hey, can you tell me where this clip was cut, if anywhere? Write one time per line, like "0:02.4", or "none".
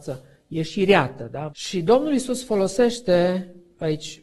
0:01.5